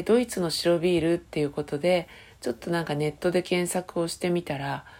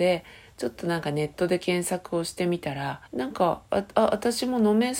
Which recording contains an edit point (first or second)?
second